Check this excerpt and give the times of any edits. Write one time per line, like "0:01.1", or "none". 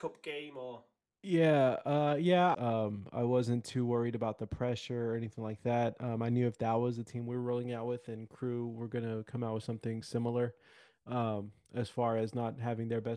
0:02.5